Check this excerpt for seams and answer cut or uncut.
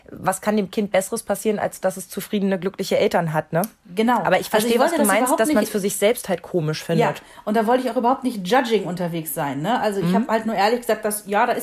uncut